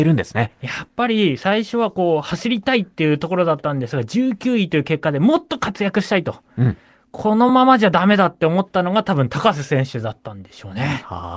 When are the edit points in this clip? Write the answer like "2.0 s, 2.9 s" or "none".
none